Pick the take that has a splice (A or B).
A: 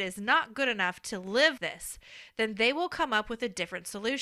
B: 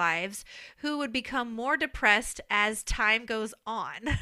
A